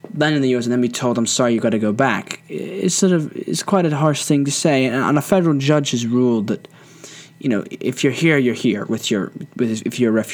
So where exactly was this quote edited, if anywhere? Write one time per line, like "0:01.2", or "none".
none